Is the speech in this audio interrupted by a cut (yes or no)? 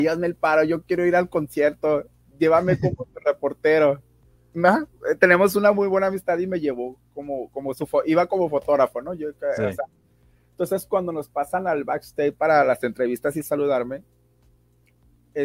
no